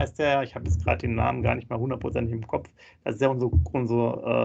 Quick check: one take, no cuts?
yes; 0 cuts

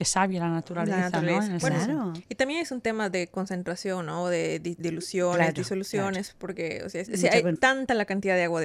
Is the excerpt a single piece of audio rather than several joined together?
no; 1 cut; at 7.1 s

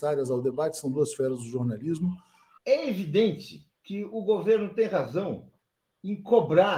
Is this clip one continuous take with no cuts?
no; 2 cuts; at 2.6 s, 3.8 s

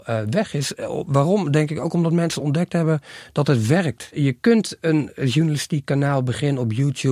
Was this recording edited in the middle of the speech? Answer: no; 0 cuts

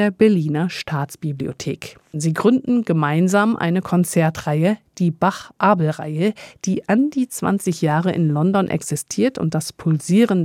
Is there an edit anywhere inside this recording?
yes; 1 cut; at 2.1 s

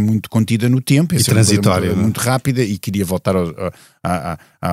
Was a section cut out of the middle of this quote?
no; 0 cuts

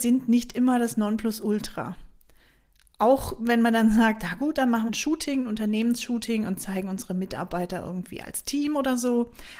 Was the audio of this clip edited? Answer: yes; 1 cut; at 4.9 s

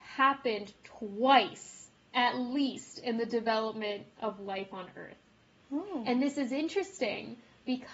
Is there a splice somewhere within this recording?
yes; 1 cut; at 5.6 s

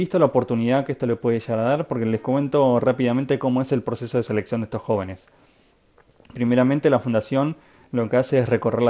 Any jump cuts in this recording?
no; 0 cuts

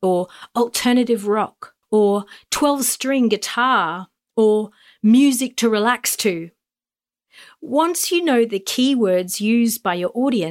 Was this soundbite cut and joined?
yes; 1 cut; at 1.8 s

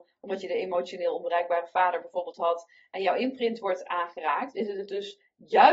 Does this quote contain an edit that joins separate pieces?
yes; 1 cut; at 4.5 s

